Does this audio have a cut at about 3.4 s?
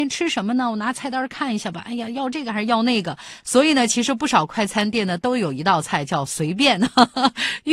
yes; 1 cut; at 3.4 s

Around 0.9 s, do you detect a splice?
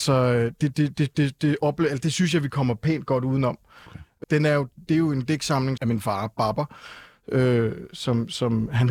no; 2 cuts; at 4.2 s, 5.8 s

